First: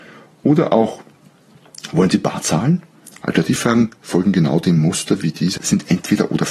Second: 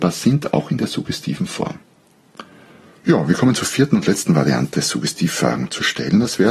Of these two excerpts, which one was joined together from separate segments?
first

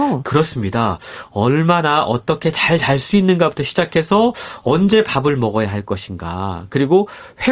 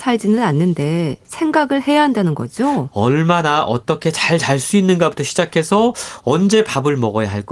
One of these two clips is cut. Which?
second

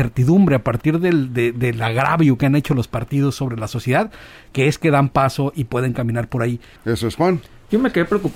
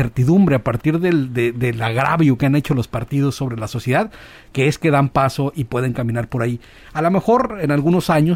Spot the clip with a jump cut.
first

